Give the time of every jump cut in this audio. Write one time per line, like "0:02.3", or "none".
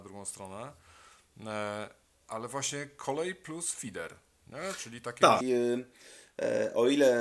0:05.4